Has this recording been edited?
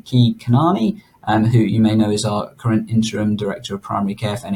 no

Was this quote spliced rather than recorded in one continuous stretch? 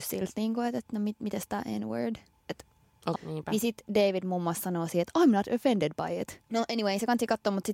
yes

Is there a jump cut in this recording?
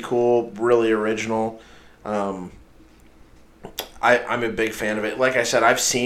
no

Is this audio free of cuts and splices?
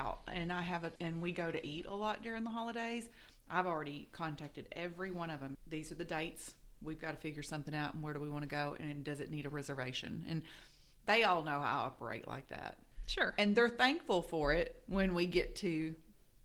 no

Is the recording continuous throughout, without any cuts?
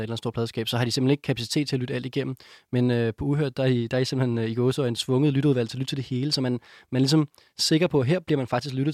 yes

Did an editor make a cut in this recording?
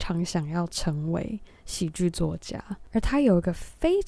no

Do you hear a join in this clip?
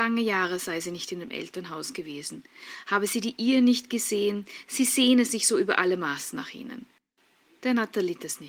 no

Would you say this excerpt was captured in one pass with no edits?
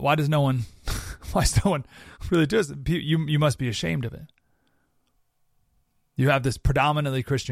yes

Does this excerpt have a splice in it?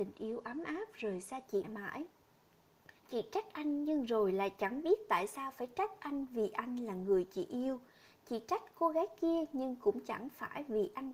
yes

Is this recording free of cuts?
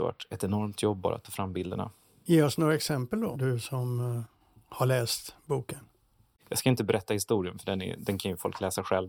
no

